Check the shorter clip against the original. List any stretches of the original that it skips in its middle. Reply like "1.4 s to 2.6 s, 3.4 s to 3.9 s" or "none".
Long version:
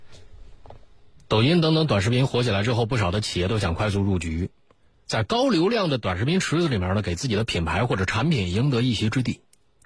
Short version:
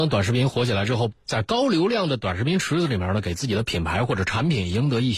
2.9 s to 4.9 s